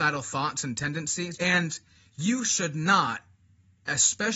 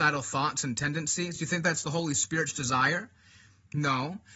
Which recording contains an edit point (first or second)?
first